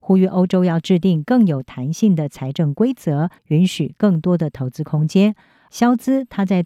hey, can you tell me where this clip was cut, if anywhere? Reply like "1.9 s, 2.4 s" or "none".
3.4 s, 5.7 s